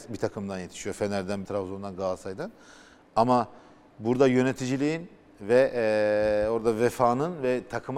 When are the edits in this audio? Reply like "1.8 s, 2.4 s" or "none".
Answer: 1.4 s